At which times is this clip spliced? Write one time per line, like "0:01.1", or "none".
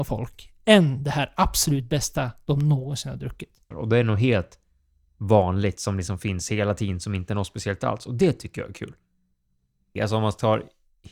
0:03.7
0:10.0